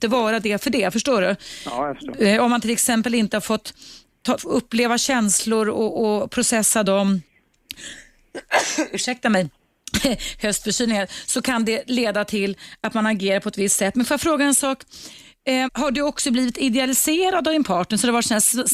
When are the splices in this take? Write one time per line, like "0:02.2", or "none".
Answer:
0:04.4
0:15.7